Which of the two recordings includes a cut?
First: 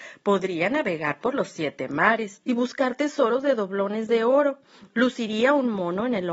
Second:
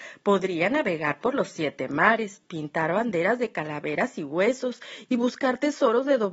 first; 1 cut; at 2.4 s

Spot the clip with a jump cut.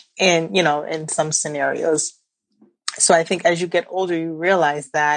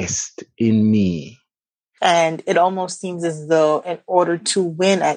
second; 1 cut; at 2.0 s

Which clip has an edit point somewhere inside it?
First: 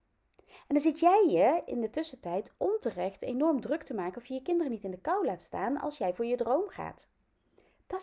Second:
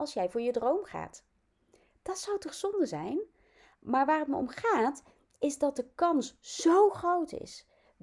second; 1 cut; at 3.7 s

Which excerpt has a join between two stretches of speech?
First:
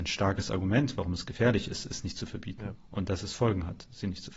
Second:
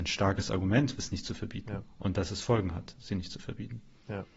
second; 1 cut; at 1.0 s

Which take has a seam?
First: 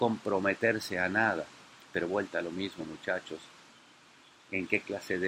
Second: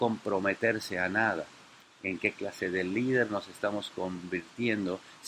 second; 1 cut; at 1.8 s

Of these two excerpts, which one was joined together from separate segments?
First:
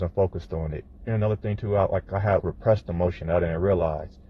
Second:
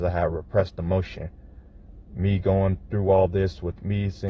first; 2 cuts; at 1.1 s, 2.4 s

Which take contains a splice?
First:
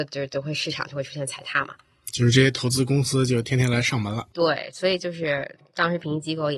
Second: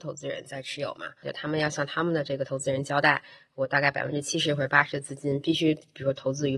second; 1 cut; at 1.2 s

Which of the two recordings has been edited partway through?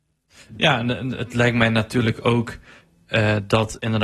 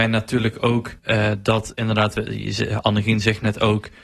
second; 1 cut; at 1.0 s

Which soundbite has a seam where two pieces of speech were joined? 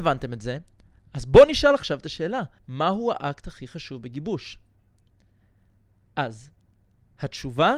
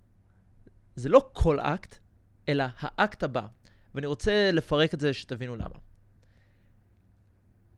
first; 1 cut; at 2.6 s

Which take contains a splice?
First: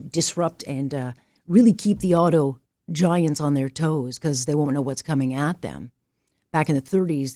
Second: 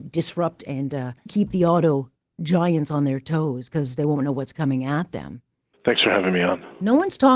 second; 2 cuts; at 1.3 s, 5.7 s

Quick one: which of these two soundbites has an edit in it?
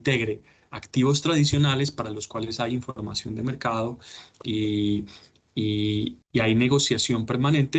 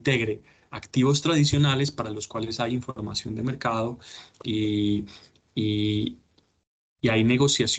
first; 1 cut; at 6.2 s

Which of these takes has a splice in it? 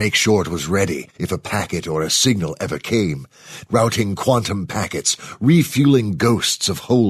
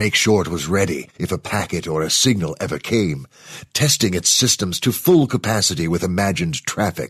first; 1 cut; at 3.7 s

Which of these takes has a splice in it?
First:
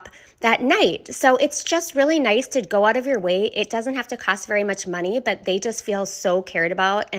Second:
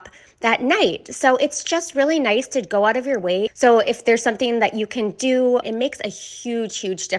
second; 2 cuts; at 3.5 s, 5.6 s

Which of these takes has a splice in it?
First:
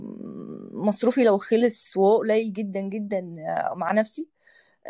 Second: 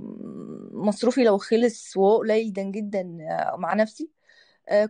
second; 1 cut; at 2.6 s

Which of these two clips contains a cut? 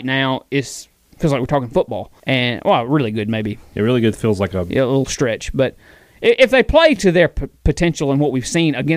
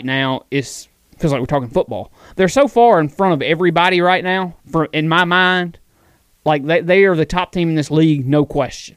first; 1 cut; at 2.2 s

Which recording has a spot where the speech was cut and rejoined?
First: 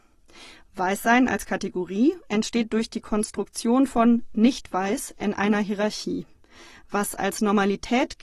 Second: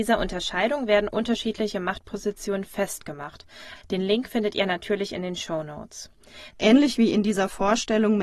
second; 2 cuts; at 3.8 s, 6.5 s

